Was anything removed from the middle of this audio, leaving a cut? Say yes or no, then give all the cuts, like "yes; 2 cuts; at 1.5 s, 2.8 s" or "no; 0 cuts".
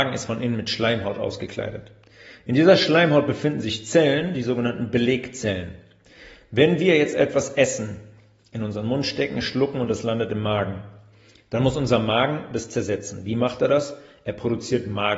no; 0 cuts